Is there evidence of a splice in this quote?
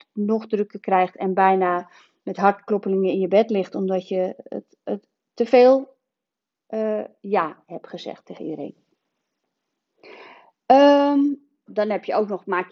yes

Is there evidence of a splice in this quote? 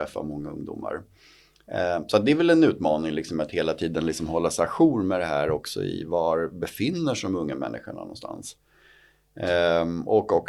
no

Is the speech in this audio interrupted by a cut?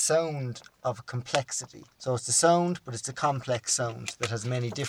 yes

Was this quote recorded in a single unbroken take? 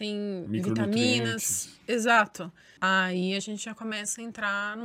no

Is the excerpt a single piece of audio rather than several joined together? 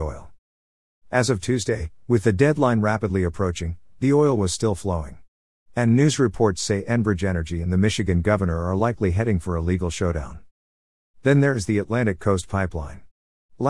yes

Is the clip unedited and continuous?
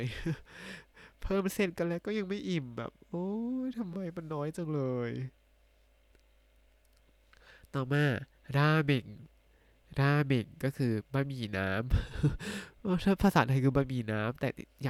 yes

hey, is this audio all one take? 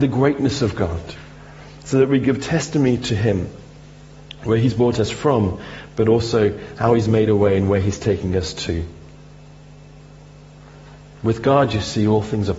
yes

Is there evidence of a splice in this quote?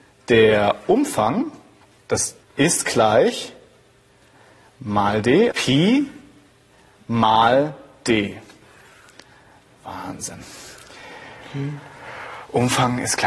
yes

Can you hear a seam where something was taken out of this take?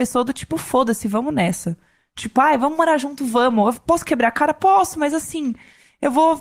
no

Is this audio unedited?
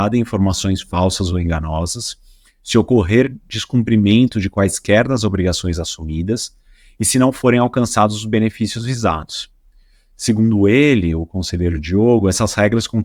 yes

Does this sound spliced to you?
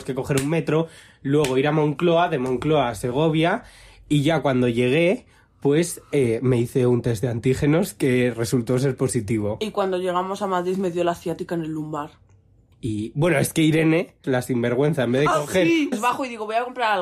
yes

